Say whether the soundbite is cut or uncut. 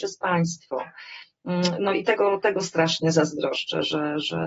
uncut